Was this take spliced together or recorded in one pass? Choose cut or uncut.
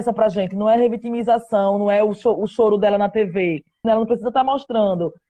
cut